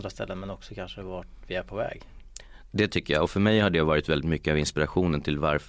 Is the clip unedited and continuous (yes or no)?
yes